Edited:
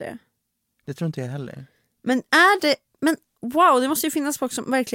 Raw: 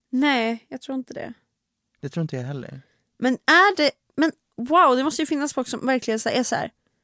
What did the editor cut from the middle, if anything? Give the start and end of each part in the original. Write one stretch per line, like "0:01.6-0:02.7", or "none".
none